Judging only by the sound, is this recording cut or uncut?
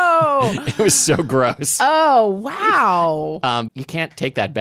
cut